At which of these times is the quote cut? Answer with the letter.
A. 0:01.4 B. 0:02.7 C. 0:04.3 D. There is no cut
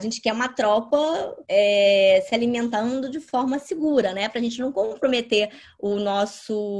A